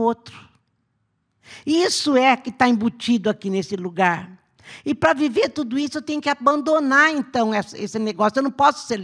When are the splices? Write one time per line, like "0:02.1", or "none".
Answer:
none